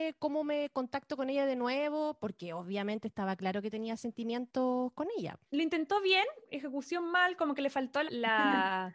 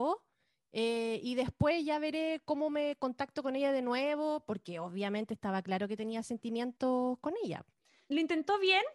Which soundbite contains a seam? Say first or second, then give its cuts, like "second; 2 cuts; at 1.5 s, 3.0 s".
first; 2 cuts; at 5.5 s, 8.1 s